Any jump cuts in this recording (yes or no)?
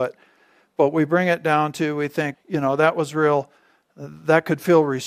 yes